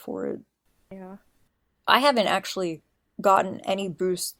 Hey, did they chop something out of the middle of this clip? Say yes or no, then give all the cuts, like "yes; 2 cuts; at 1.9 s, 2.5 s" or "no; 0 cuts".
no; 0 cuts